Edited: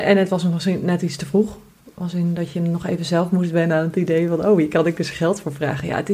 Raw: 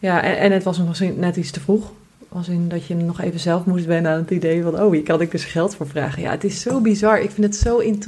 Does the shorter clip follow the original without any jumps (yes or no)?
yes